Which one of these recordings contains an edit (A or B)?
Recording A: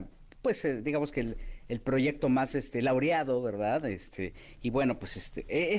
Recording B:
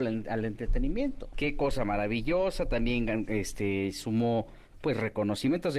B